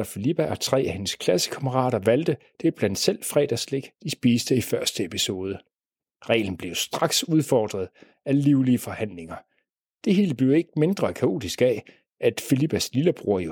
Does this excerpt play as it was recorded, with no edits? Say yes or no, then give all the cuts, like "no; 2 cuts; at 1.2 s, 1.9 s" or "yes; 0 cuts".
yes; 0 cuts